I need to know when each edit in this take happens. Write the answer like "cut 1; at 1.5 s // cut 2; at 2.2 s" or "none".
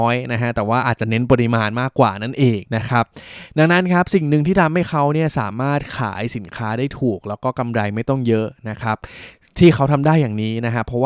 cut 1; at 2.7 s